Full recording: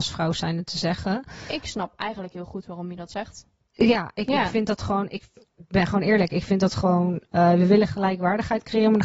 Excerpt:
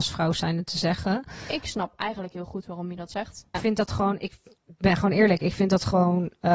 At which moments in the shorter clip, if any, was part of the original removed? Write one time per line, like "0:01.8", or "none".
0:03.5

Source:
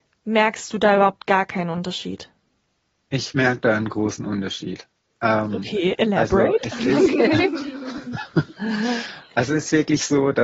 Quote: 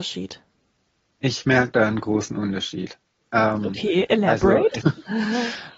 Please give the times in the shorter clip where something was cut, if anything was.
0:04.8

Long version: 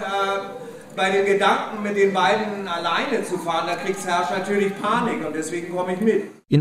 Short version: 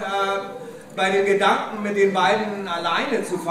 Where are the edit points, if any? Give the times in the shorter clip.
none

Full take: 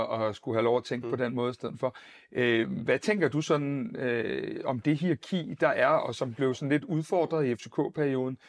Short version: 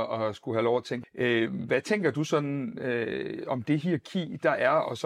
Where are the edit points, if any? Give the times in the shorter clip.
0:01.0

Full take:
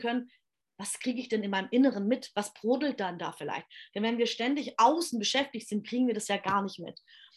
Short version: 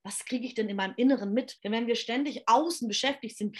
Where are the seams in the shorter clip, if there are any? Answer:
0:01.6

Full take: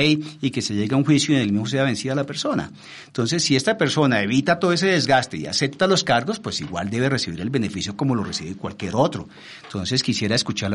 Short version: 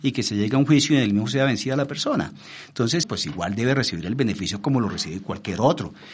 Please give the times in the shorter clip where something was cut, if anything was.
0:03.0

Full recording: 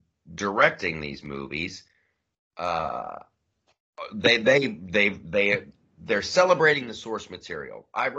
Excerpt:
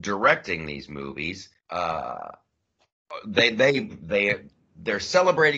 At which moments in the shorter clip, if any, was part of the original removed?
0:01.6
0:03.9

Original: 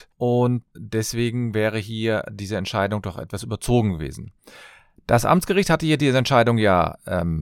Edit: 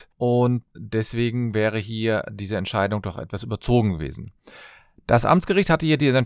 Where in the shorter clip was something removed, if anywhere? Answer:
none

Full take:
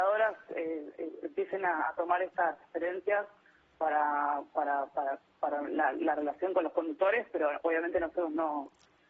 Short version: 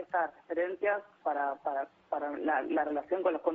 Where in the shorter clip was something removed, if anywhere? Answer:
0:01.2

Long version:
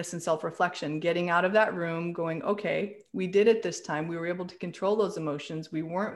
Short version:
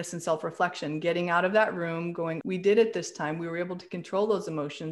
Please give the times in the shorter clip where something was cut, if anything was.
0:02.4

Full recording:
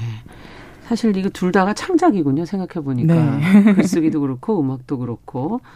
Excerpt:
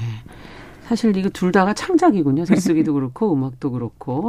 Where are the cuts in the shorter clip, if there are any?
0:02.5

